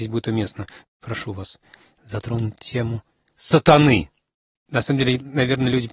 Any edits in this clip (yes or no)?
yes